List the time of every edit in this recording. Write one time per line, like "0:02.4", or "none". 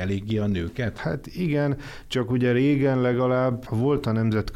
0:01.0
0:03.7